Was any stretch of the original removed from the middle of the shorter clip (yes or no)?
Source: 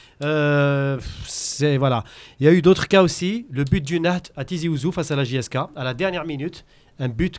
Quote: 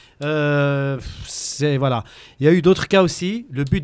no